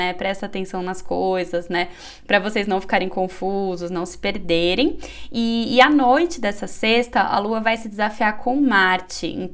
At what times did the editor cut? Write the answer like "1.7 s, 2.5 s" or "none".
none